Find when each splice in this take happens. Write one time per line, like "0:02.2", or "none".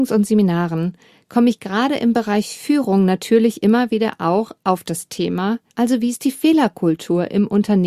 0:05.7